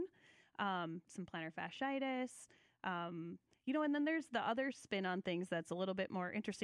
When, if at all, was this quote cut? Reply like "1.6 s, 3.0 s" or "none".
1.1 s

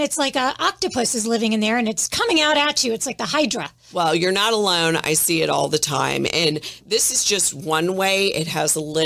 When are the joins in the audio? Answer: none

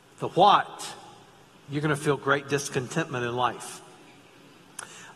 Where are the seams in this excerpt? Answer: 1.5 s

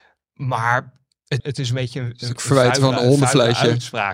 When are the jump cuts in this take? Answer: 1.4 s

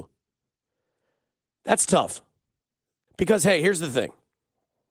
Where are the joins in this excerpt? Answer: 3.1 s

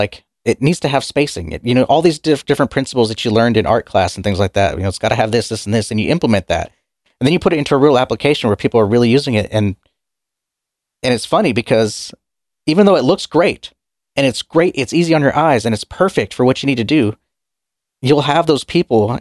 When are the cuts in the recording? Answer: none

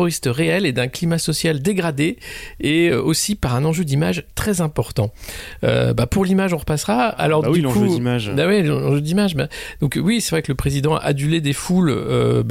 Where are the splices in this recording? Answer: none

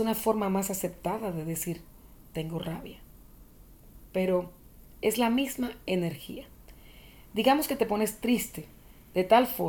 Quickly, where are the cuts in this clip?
none

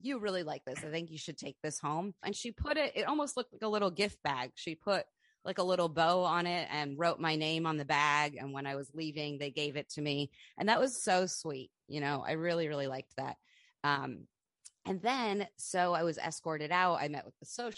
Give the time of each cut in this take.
2.2 s

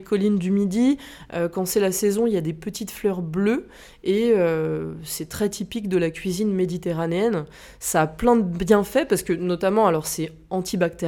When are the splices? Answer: none

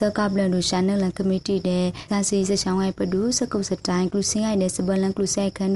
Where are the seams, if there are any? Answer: 2.1 s

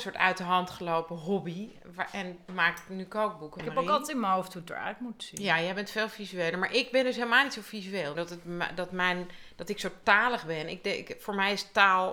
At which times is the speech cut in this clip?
3.6 s, 8.2 s

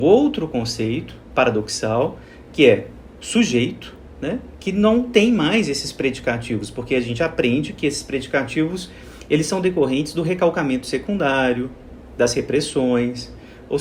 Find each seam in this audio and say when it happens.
none

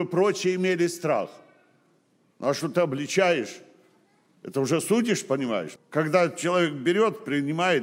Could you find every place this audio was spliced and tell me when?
5.8 s

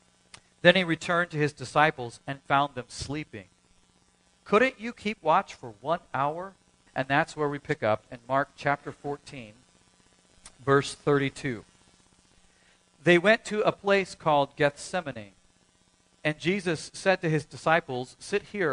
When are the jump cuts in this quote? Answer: 4.4 s, 6.9 s

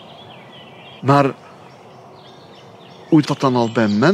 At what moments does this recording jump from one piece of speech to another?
1.0 s, 3.2 s

